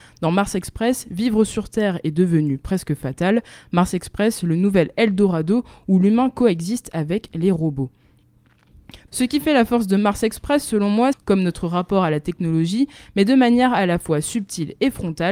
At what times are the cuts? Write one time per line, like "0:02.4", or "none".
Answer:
0:09.1
0:11.1